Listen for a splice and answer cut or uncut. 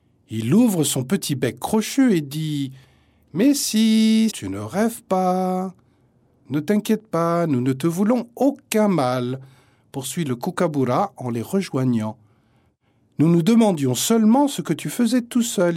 cut